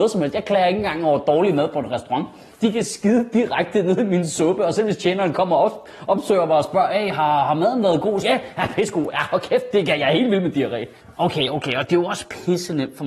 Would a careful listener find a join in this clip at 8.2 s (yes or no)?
yes